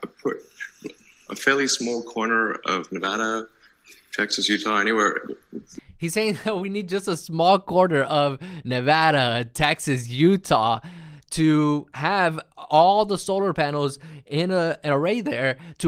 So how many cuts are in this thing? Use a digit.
0